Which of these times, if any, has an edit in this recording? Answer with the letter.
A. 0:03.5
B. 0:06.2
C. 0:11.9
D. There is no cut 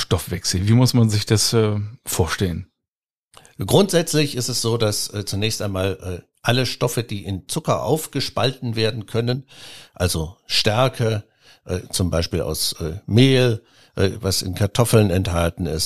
D